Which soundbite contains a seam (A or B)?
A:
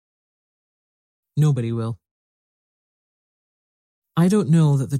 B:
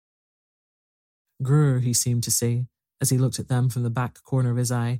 A